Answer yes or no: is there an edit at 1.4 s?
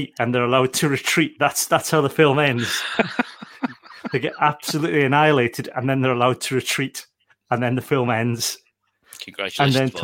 no